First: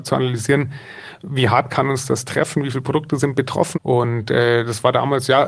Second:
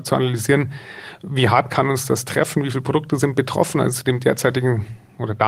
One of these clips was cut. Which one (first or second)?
first